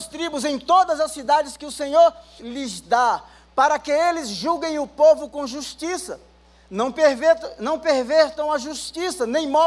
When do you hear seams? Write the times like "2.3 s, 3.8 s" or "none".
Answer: 2.4 s